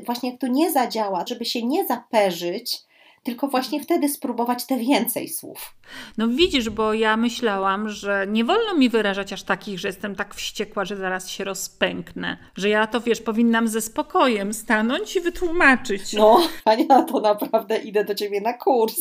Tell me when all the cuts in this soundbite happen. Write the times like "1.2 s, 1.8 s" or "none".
1.3 s, 12.5 s, 16.6 s